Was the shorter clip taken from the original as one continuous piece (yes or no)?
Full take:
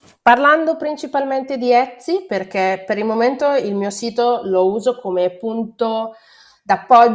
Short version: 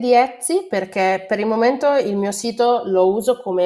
yes